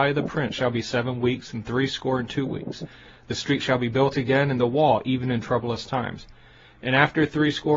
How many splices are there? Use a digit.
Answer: 0